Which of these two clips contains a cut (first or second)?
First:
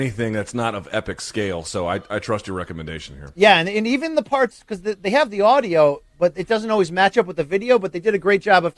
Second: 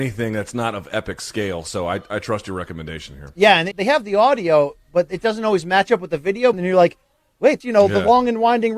second